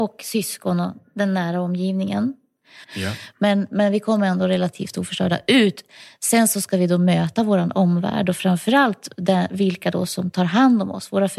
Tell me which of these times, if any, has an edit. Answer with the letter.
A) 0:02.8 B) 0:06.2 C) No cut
A